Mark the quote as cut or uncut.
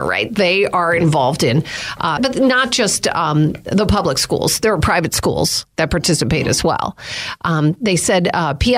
cut